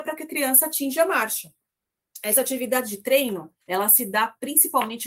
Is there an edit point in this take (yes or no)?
yes